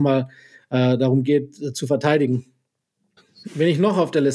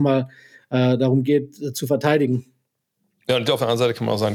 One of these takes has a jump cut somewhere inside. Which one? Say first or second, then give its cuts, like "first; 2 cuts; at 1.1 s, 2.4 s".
first; 1 cut; at 3.2 s